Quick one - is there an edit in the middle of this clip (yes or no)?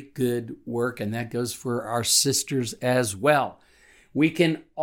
no